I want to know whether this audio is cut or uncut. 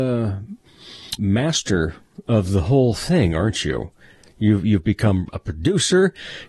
cut